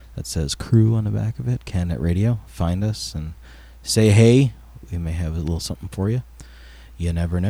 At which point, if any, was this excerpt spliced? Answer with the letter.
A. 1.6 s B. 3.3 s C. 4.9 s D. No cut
D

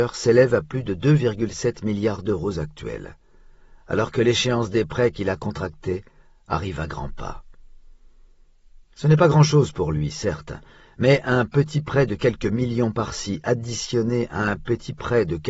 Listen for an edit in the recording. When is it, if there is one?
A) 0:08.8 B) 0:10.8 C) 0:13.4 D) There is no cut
D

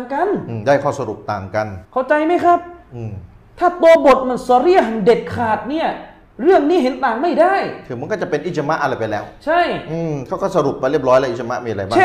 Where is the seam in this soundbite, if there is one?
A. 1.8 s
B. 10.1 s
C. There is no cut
A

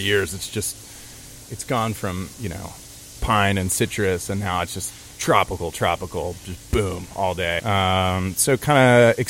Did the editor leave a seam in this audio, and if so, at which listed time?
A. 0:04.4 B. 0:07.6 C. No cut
B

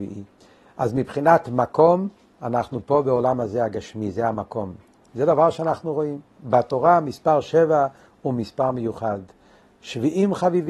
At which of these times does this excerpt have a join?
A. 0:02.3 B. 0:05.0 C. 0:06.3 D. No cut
B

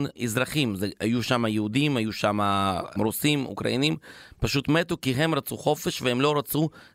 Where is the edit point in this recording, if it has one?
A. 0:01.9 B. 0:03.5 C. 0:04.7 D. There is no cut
D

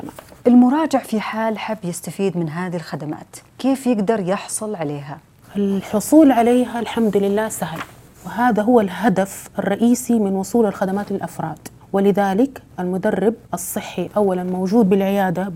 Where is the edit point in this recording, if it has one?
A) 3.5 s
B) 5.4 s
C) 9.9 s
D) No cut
A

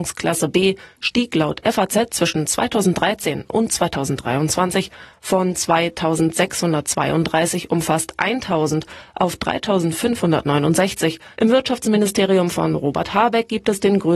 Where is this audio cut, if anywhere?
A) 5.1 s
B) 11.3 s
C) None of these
B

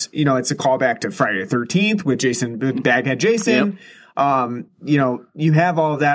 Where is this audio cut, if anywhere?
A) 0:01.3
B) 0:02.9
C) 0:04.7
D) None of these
D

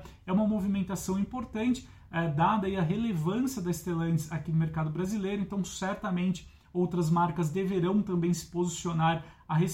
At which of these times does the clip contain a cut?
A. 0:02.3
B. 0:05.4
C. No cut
C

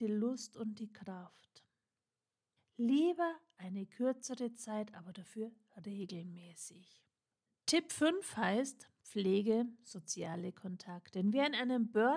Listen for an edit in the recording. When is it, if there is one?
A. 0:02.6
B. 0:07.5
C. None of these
A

